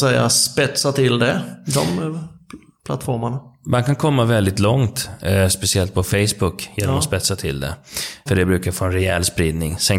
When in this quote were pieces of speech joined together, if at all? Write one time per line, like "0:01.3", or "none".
0:08.3